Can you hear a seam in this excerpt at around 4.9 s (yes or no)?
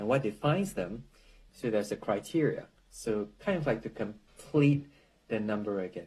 no